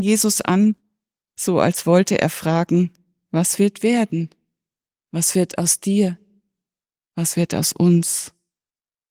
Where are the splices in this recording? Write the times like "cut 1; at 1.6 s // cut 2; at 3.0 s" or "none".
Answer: none